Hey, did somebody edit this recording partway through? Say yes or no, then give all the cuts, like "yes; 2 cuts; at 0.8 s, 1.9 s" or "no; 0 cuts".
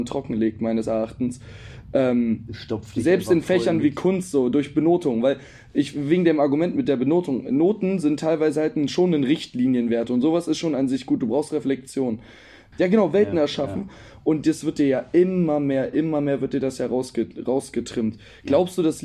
yes; 1 cut; at 12.7 s